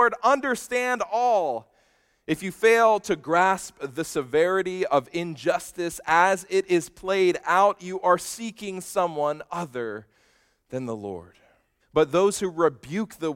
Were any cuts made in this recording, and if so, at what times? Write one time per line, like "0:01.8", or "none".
0:11.8